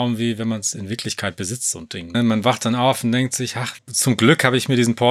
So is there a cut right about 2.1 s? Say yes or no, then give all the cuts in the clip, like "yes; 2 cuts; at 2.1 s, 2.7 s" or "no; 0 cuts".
yes; 2 cuts; at 2.1 s, 3.8 s